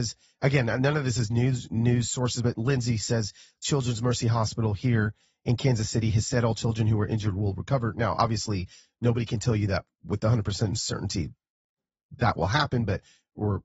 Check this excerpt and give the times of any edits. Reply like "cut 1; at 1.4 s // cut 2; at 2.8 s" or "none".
none

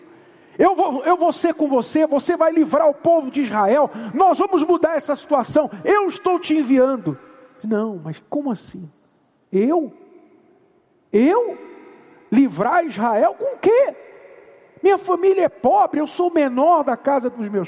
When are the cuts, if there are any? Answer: cut 1; at 7.6 s

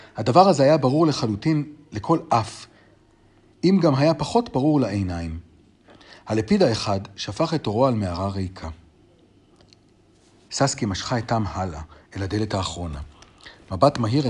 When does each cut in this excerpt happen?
cut 1; at 10.5 s

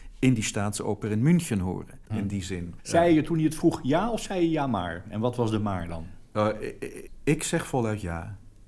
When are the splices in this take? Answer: cut 1; at 2.1 s

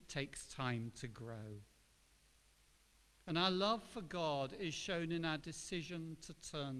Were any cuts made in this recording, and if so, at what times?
none

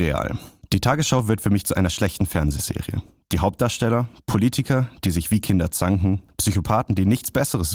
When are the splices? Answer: none

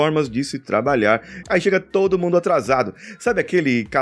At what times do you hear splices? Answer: cut 1; at 1.4 s

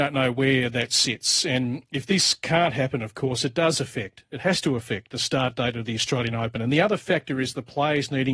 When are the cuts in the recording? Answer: none

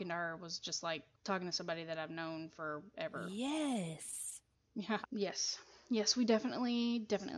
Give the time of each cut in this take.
cut 1; at 5.0 s

